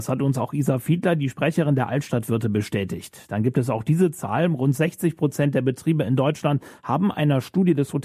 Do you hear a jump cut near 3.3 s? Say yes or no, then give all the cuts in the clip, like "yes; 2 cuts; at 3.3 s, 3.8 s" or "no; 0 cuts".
no; 0 cuts